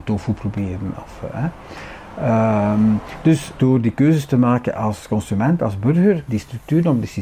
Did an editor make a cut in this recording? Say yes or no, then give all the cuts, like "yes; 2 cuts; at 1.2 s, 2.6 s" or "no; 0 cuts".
yes; 1 cut; at 6.3 s